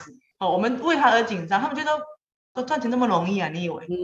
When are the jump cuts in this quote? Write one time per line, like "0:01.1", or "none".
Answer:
0:02.6